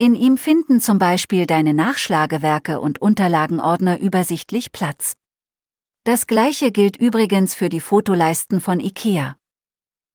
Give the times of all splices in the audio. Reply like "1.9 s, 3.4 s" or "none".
none